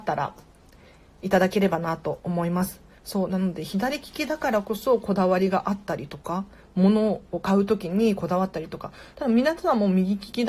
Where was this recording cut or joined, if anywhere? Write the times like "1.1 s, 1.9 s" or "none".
none